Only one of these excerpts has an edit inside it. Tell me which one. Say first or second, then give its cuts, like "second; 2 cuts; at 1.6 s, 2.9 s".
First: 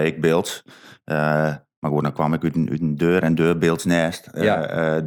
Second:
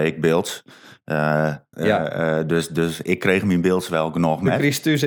second; 1 cut; at 1.7 s